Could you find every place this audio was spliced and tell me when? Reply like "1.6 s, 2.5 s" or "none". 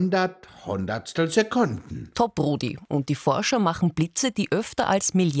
none